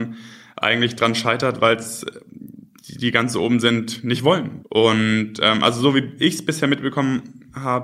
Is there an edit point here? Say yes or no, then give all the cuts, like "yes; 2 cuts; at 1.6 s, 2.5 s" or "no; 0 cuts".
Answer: yes; 1 cut; at 4.6 s